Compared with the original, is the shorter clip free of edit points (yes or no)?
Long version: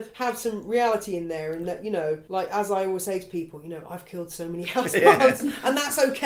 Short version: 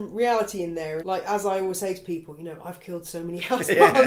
no